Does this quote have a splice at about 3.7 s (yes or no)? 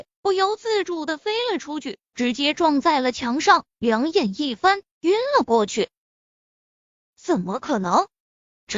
no